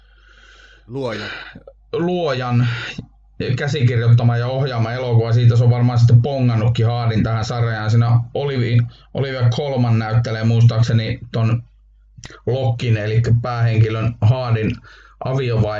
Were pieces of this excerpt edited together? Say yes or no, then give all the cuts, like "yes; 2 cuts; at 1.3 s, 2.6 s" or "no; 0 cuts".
no; 0 cuts